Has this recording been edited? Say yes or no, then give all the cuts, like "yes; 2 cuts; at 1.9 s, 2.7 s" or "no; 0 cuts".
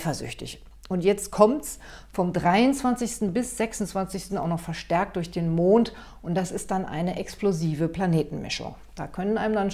yes; 1 cut; at 4.3 s